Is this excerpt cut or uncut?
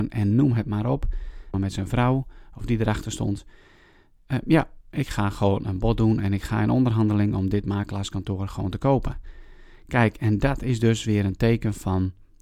cut